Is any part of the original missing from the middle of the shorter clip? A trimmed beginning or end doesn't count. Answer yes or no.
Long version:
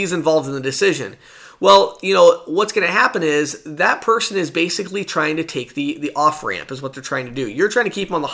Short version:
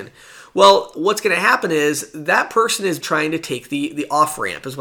yes